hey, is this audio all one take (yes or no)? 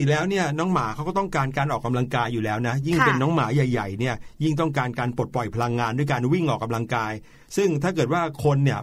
yes